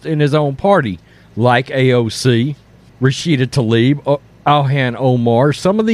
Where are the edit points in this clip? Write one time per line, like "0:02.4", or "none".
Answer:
0:02.9

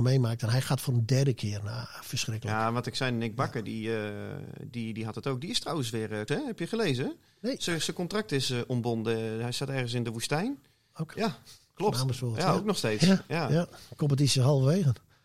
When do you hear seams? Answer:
0:06.3
0:11.1

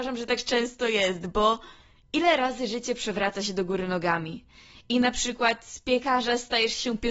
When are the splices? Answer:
none

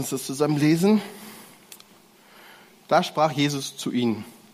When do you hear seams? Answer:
none

